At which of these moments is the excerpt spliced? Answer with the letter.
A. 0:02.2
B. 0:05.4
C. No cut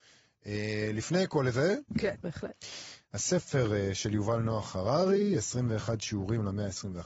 A